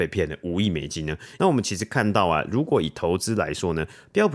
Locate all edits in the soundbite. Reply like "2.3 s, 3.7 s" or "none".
1.4 s